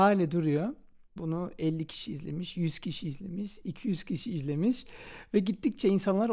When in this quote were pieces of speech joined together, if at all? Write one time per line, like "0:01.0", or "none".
0:01.2